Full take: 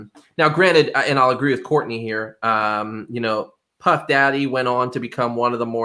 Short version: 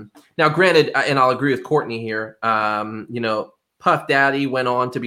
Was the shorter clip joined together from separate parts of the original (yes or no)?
no